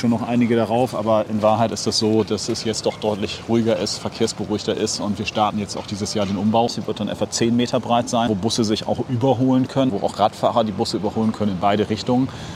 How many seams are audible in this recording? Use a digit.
3